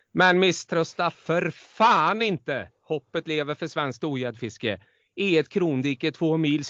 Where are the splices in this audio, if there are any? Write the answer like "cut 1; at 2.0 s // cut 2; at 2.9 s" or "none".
none